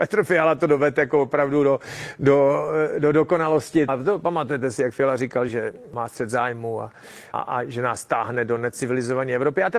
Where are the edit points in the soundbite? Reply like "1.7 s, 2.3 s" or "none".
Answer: 3.9 s, 5.5 s, 7.3 s